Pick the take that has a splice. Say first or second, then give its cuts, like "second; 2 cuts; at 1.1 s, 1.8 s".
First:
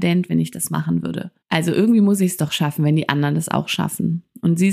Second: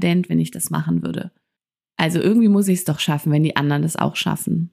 first; 1 cut; at 1.4 s